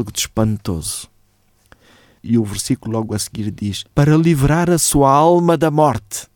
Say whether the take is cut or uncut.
cut